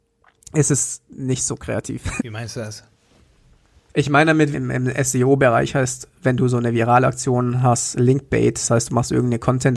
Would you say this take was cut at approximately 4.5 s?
yes; 2 cuts; at 2.2 s, 4.5 s

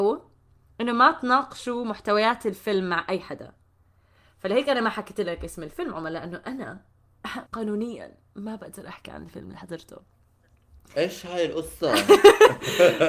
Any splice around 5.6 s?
no; 1 cut; at 7.5 s

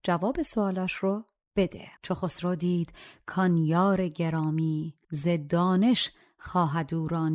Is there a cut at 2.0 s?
yes; 2 cuts; at 2.0 s, 5.0 s

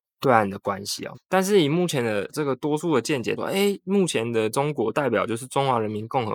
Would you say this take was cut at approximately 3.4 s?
yes; 2 cuts; at 1.1 s, 3.4 s

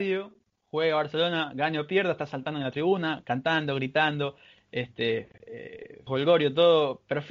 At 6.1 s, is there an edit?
yes; 1 cut; at 6.1 s

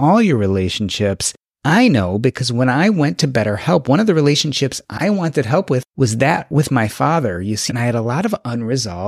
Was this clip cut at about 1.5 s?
no; 1 cut; at 7.7 s

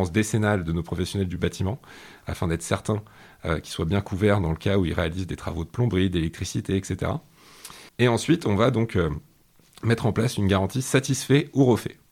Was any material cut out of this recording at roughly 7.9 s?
yes; 1 cut; at 7.9 s

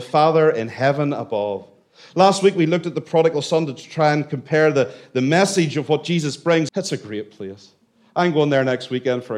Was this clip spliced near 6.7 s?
yes; 1 cut; at 6.7 s

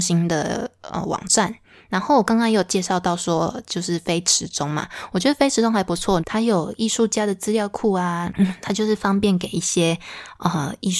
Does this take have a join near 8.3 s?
yes; 2 cuts; at 6.2 s, 8.3 s

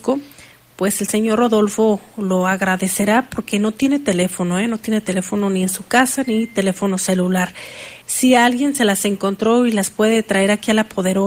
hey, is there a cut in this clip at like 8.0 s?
yes; 1 cut; at 8.0 s

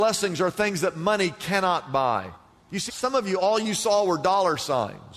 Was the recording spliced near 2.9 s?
yes; 1 cut; at 2.9 s

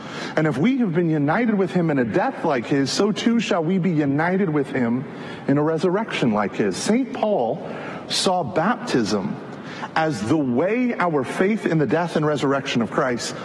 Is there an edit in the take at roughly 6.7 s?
no; 0 cuts

